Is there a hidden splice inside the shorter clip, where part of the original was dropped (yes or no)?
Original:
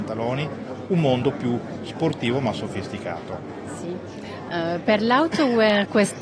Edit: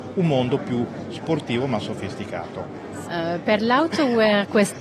yes